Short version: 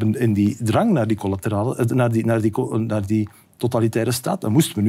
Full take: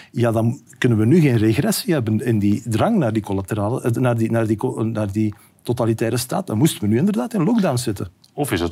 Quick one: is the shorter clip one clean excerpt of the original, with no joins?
yes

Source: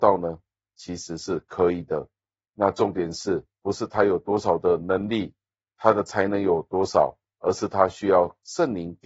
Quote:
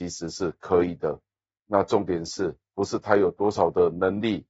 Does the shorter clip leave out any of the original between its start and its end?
no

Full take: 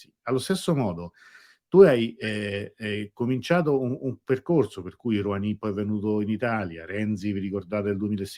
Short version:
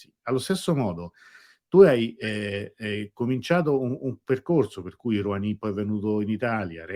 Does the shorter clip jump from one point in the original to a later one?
no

